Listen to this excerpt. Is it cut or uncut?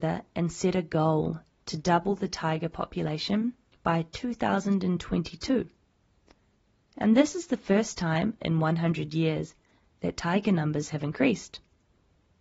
uncut